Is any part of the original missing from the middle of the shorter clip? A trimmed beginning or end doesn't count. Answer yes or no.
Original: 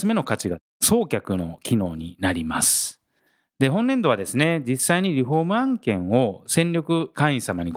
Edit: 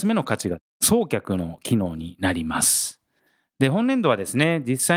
no